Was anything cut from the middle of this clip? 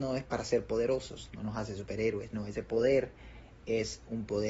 yes; 1 cut; at 1.3 s

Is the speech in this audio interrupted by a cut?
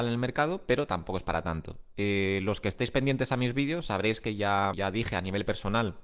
yes; 1 cut; at 4.7 s

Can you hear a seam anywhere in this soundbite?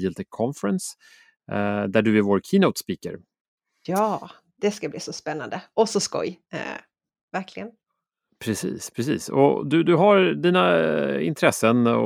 no; 0 cuts

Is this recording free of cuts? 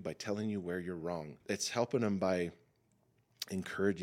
no; 1 cut; at 1.4 s

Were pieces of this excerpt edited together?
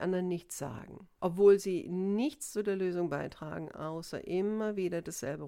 yes; 1 cut; at 1.2 s

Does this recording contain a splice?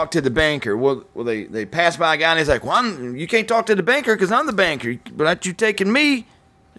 no; 0 cuts

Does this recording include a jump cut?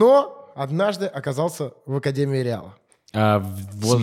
no; 0 cuts

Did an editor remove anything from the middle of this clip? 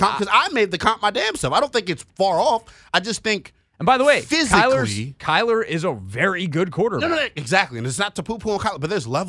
no; 0 cuts

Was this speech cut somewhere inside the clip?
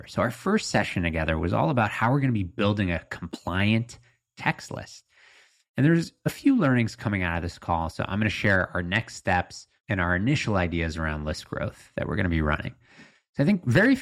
no; 0 cuts

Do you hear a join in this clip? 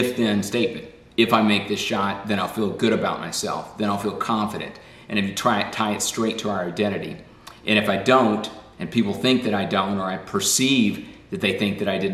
no; 0 cuts

